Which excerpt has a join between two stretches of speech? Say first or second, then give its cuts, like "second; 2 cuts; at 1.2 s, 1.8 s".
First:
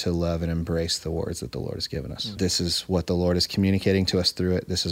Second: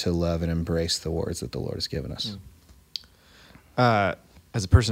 first; 1 cut; at 2.4 s